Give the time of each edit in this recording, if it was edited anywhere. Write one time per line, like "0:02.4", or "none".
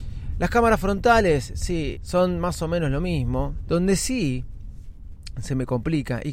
0:01.9
0:03.7